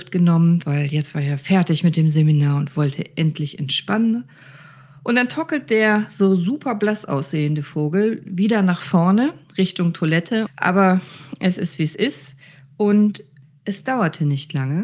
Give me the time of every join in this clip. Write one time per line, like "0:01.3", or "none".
0:10.5